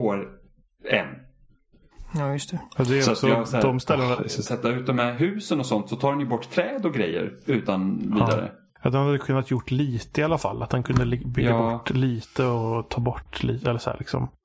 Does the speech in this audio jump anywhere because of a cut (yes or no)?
yes